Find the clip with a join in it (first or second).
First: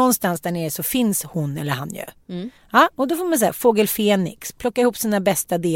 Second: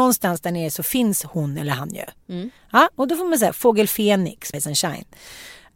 second